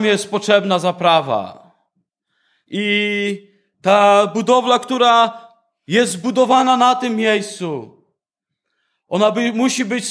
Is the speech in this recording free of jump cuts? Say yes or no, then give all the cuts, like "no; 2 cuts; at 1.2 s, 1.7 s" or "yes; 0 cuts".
yes; 0 cuts